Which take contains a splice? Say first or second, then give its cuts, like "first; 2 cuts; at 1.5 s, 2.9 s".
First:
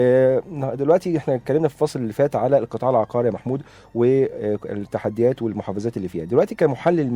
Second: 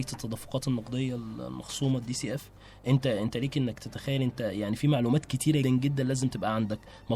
second; 1 cut; at 5.6 s